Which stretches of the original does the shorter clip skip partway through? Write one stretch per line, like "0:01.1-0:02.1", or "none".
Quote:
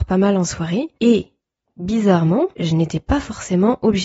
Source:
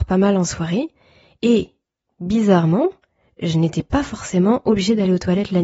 0:00.9-0:01.4
0:02.9-0:03.3